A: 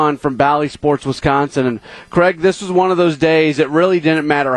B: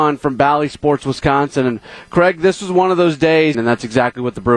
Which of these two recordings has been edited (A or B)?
B